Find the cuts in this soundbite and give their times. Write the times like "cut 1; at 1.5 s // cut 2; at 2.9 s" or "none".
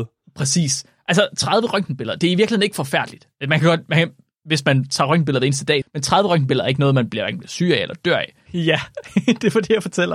cut 1; at 5.8 s // cut 2; at 8.5 s